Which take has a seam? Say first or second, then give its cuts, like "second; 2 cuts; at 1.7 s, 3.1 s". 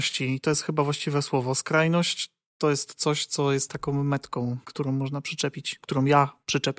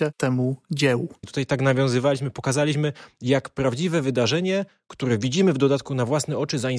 second; 1 cut; at 1.2 s